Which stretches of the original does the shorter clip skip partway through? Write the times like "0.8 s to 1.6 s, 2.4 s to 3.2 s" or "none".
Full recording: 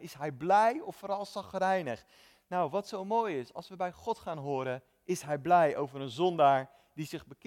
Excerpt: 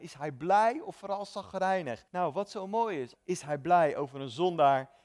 2.1 s to 2.4 s, 3.5 s to 5.0 s